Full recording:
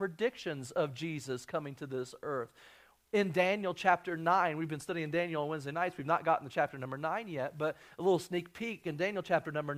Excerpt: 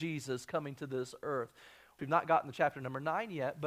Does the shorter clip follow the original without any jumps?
no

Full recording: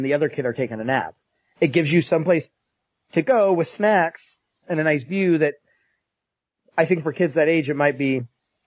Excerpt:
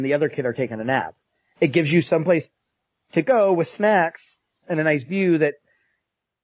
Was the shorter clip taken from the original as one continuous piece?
yes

